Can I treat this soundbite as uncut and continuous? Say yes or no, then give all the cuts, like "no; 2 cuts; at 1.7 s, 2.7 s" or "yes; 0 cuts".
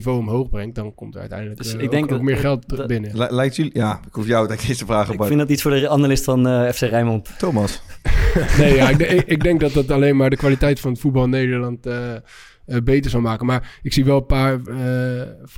no; 1 cut; at 3.1 s